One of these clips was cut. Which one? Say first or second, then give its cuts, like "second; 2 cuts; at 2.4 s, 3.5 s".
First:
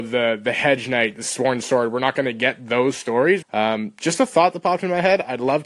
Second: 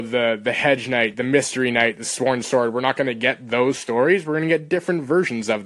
first; 2 cuts; at 1.1 s, 3.4 s